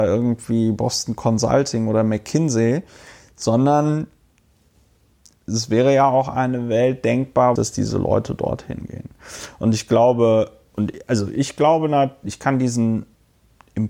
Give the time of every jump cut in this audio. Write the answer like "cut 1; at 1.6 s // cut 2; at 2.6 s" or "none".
cut 1; at 7.6 s